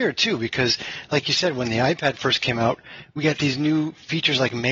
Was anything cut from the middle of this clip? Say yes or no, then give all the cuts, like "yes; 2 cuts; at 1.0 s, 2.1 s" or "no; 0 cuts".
no; 0 cuts